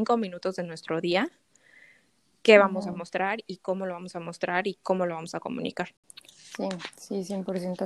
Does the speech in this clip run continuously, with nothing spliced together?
yes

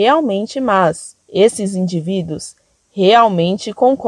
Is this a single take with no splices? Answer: no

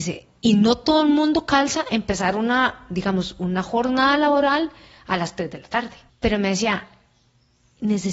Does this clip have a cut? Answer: yes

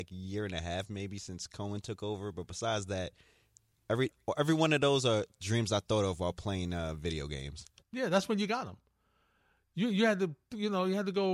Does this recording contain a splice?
no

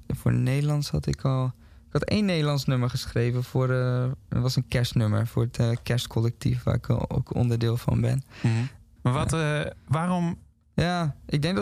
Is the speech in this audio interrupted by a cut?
yes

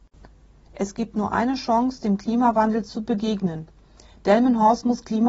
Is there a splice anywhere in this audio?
no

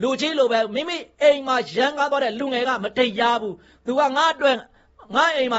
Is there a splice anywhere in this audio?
no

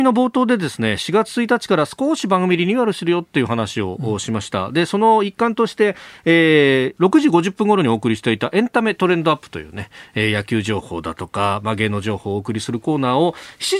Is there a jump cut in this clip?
no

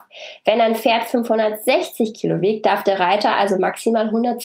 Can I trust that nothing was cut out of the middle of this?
yes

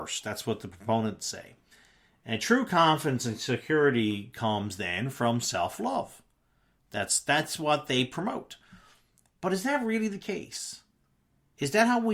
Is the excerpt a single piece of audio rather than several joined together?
yes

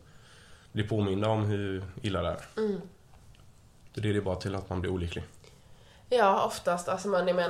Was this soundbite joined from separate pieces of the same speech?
no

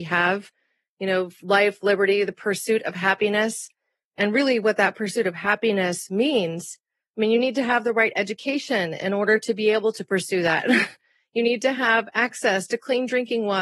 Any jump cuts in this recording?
no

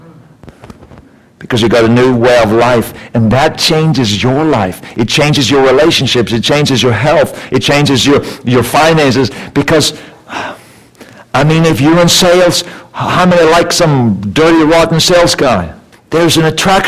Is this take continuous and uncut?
no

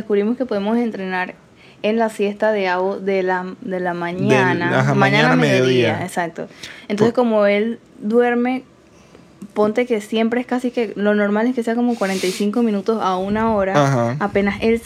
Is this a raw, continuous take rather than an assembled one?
yes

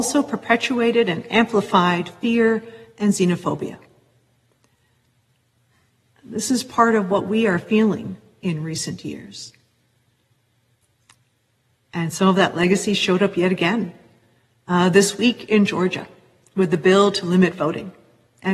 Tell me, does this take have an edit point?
yes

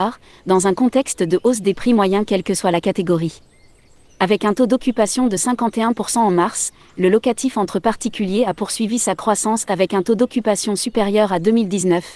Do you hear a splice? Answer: no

